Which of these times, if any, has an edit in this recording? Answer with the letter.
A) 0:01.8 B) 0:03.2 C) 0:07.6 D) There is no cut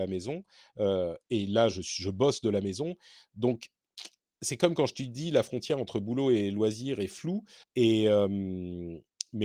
C